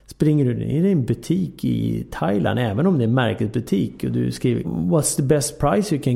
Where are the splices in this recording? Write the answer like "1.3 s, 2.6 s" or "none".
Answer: 4.6 s